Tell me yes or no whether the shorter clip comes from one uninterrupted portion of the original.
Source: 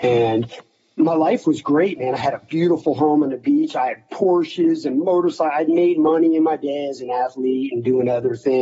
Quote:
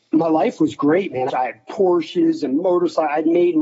no